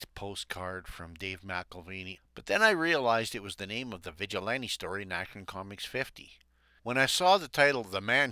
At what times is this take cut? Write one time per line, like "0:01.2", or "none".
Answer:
0:02.2
0:06.8